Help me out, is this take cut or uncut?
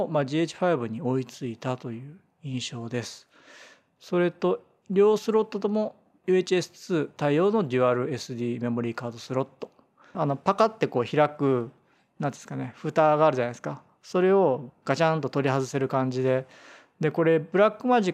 cut